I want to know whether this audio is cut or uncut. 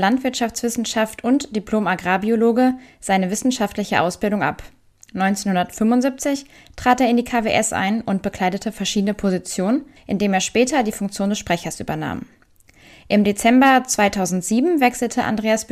cut